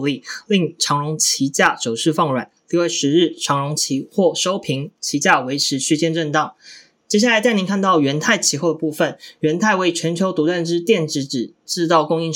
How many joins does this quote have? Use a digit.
0